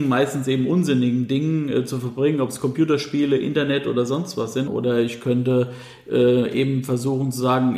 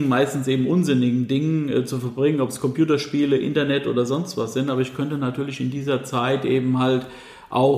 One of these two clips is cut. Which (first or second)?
first